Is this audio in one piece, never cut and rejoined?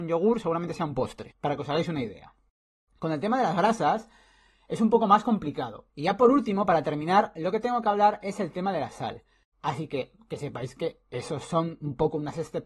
no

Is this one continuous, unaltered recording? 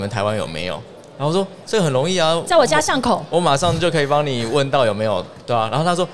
yes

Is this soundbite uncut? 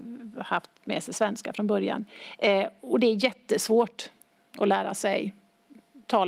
yes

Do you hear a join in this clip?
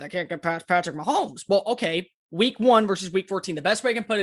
no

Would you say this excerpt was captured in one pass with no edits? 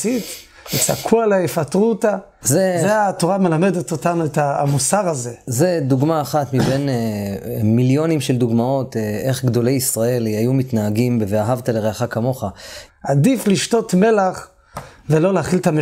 no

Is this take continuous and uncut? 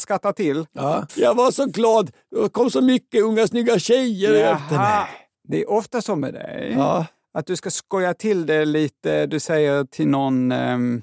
no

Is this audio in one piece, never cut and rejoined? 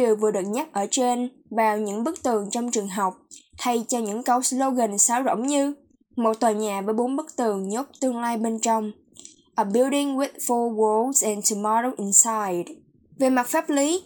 no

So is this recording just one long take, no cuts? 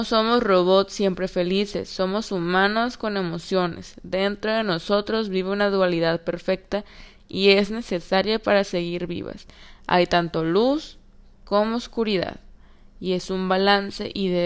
yes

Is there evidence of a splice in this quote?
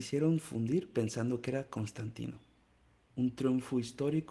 yes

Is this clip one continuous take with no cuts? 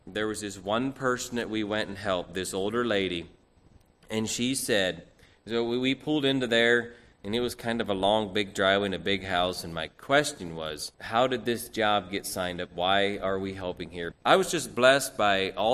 no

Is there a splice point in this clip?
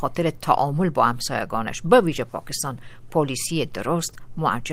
no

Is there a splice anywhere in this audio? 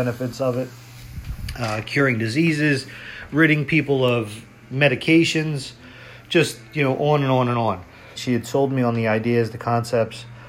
yes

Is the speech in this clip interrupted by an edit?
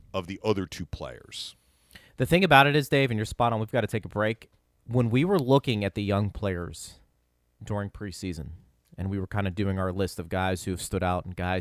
no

